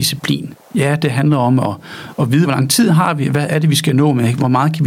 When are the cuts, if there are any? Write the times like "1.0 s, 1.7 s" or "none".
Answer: 2.4 s